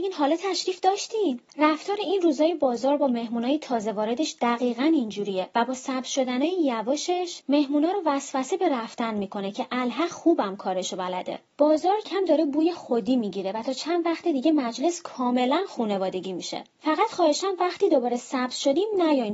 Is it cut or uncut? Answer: cut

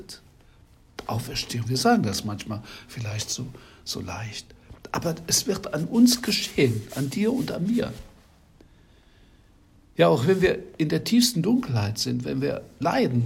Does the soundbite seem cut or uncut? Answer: uncut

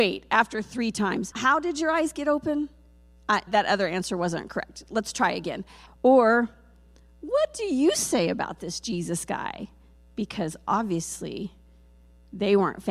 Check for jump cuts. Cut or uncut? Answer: cut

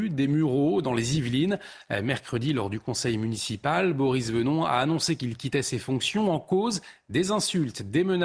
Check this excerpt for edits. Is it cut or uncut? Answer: uncut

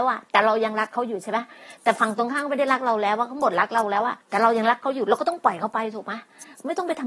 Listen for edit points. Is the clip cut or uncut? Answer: cut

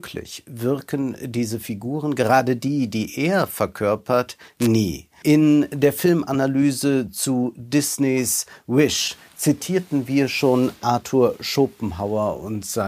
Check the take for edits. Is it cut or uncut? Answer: cut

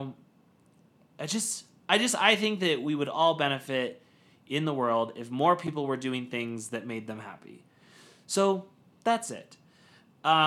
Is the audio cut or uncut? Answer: uncut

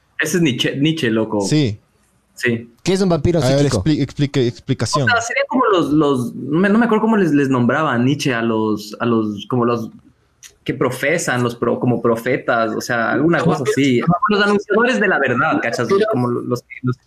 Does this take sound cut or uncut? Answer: cut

